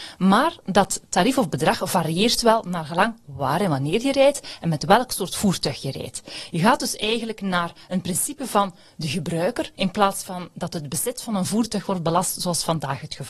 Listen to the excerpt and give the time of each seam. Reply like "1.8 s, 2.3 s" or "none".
9.8 s